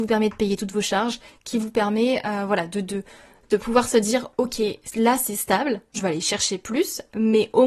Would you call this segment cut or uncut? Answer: cut